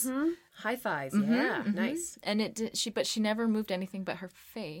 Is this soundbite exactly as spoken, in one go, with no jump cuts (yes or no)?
yes